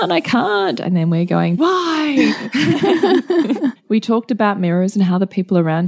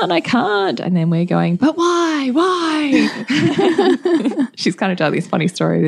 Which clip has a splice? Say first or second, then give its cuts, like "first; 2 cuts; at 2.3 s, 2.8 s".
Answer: first; 2 cuts; at 1.6 s, 3.8 s